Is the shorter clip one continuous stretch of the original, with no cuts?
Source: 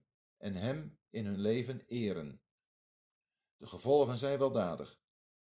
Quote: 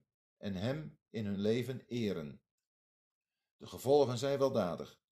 yes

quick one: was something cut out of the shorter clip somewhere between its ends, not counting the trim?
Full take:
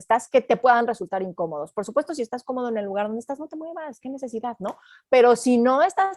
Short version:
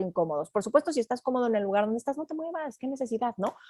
no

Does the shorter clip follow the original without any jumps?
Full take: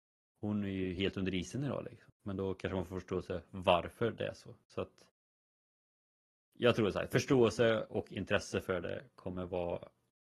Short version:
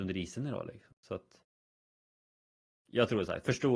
no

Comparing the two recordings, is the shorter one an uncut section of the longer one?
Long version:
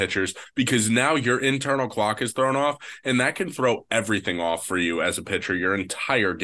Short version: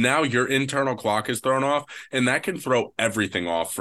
yes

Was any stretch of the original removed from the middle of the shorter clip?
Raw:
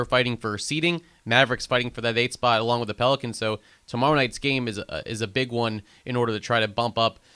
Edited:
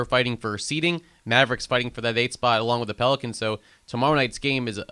no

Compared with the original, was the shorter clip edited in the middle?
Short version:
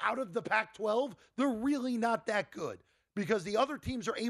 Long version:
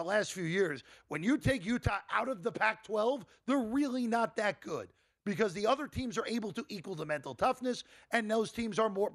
no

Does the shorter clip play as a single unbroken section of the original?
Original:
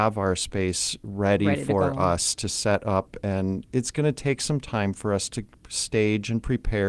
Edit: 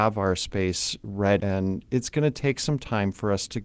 no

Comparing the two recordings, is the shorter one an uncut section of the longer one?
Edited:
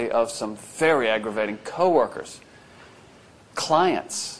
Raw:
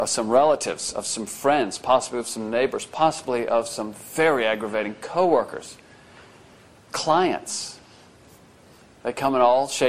yes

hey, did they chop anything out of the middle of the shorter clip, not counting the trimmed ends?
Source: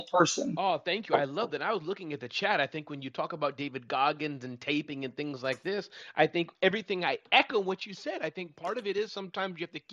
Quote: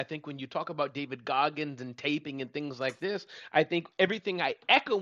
no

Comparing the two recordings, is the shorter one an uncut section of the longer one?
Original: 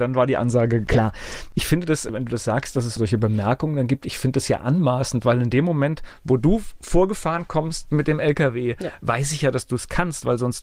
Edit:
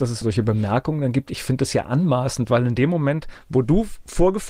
yes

